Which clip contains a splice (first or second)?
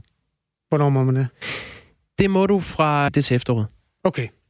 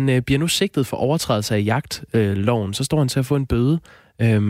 first